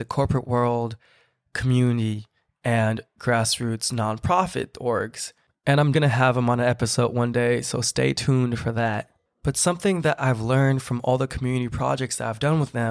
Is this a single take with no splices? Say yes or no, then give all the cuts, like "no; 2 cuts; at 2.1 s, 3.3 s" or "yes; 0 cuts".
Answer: no; 1 cut; at 5.9 s